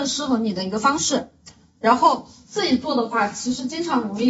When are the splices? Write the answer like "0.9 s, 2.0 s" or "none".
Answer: none